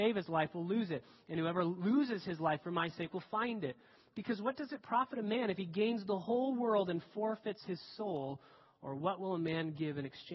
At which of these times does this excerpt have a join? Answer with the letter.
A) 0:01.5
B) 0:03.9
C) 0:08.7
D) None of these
D